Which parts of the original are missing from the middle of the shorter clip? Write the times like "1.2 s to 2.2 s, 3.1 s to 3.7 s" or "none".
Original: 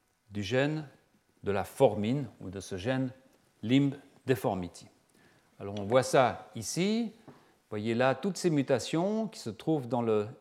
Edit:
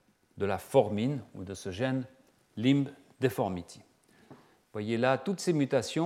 5.3 s to 7.2 s